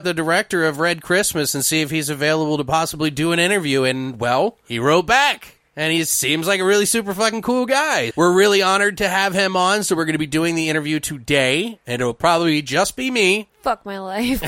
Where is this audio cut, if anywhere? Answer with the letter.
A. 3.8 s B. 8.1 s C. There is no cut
B